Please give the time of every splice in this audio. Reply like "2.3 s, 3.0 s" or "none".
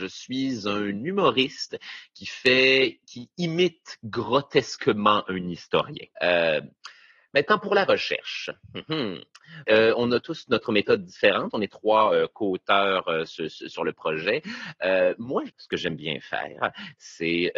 15.5 s